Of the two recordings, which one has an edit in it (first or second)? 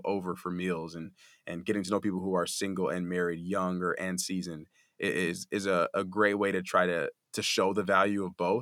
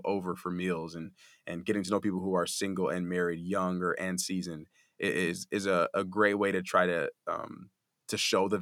first